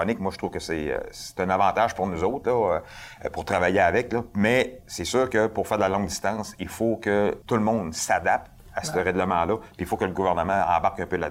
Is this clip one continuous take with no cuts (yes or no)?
no